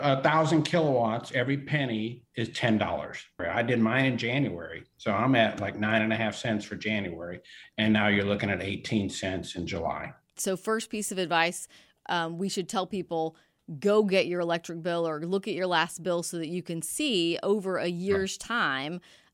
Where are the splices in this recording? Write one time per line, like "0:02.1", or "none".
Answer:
0:03.4
0:10.4